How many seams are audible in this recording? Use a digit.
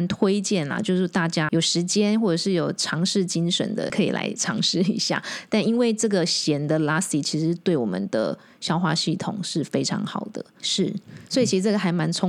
3